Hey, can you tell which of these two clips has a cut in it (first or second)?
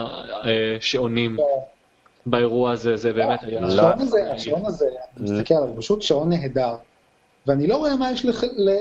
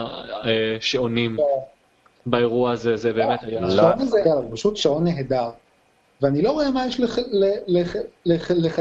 second